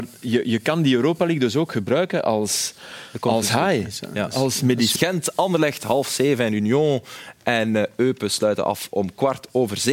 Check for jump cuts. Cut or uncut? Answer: cut